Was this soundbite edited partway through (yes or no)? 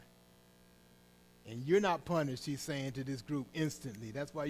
no